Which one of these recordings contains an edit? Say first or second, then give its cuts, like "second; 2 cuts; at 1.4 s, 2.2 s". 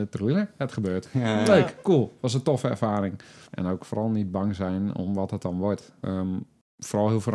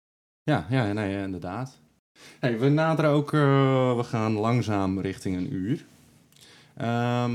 first; 2 cuts; at 3.5 s, 6.0 s